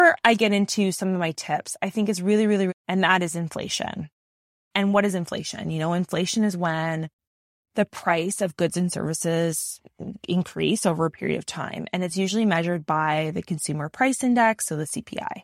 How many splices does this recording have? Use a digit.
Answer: 1